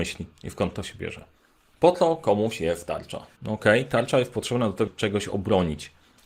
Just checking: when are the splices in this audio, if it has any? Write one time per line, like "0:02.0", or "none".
0:01.7
0:03.4
0:04.9